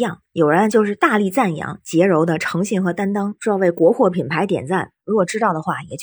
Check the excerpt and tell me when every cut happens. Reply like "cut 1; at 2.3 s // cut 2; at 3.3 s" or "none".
cut 1; at 5.0 s